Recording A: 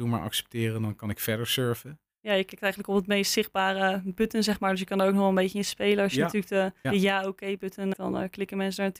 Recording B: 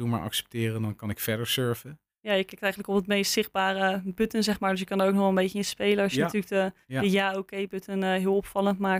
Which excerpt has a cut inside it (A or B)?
A